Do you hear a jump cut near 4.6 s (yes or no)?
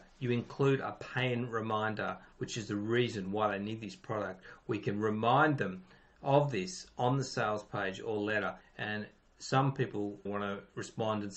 no